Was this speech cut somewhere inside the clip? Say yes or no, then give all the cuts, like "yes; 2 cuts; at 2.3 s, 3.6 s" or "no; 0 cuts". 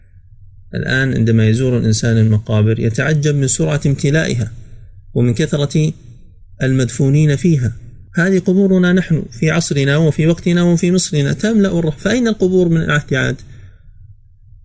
yes; 1 cut; at 8.1 s